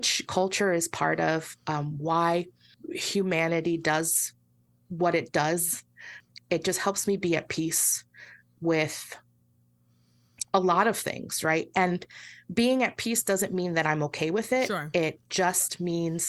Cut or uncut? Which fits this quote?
uncut